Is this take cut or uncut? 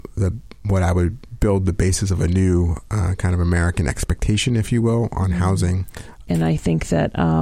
cut